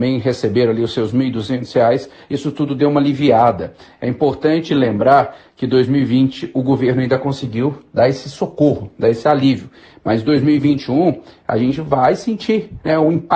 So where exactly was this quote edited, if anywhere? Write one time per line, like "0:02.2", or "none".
none